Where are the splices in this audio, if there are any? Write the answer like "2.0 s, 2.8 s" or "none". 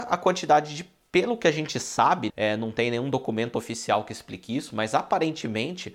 2.3 s